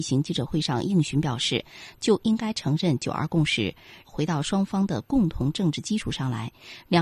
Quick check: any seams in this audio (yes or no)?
yes